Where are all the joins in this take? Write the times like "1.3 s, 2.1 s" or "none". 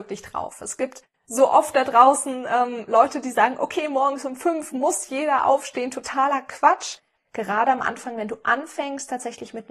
7.2 s